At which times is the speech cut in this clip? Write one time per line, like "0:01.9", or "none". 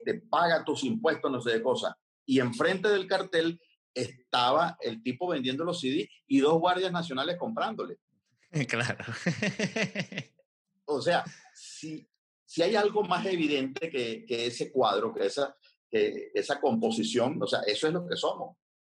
none